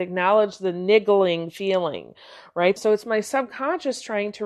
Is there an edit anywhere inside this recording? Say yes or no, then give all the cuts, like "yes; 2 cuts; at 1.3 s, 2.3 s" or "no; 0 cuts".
yes; 1 cut; at 2.8 s